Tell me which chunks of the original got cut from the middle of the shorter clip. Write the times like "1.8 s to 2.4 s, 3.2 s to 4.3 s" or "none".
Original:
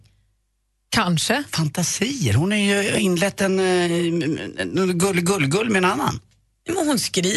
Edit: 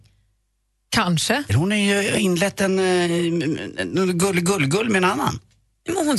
1.5 s to 2.3 s